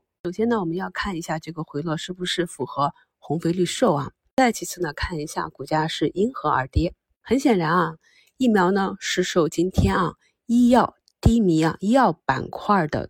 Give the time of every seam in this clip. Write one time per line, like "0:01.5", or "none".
none